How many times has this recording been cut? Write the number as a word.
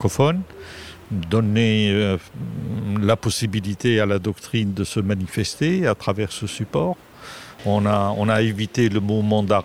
one